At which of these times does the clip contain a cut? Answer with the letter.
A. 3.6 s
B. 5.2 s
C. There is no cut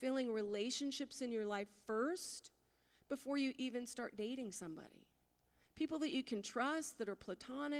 C